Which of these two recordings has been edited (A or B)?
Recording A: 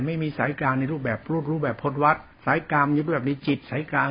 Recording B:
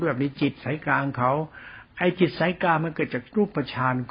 A